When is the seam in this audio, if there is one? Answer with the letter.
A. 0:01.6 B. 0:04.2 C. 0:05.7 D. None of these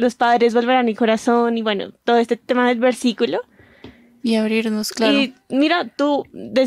B